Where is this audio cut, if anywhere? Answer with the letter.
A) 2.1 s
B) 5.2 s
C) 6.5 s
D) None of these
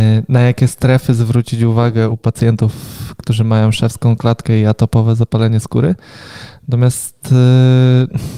A